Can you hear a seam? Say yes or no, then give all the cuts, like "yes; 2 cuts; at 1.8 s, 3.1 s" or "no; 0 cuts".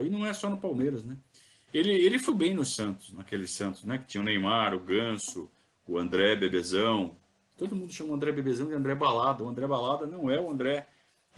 yes; 1 cut; at 2.3 s